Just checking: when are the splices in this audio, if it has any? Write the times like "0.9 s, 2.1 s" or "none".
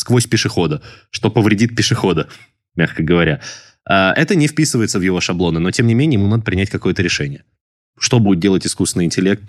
none